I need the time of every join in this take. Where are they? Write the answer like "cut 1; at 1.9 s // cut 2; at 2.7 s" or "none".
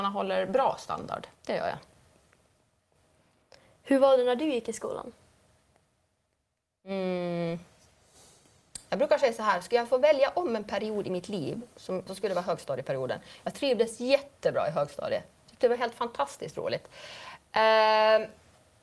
cut 1; at 1.4 s // cut 2; at 12.1 s